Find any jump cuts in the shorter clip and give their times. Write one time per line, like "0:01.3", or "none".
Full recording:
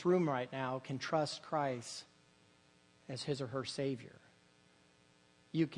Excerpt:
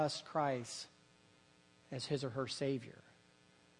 none

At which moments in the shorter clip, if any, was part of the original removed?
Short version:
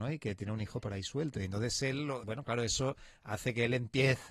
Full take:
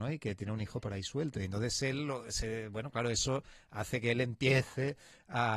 0:02.2

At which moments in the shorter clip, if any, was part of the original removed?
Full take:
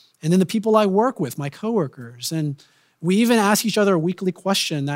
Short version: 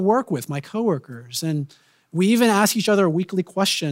none

